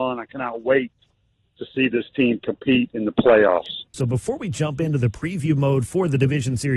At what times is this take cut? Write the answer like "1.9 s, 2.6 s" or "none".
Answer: 3.9 s